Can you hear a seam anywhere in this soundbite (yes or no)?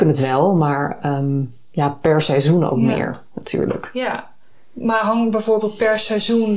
no